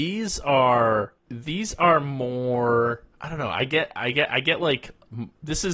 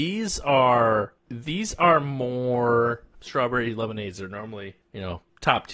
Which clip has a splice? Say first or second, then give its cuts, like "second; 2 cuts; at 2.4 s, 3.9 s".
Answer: second; 1 cut; at 3.1 s